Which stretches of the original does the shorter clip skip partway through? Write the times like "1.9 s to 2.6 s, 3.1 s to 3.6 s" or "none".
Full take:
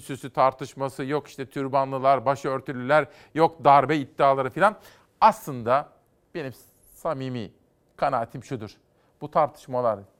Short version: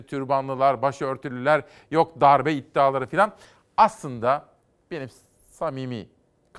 none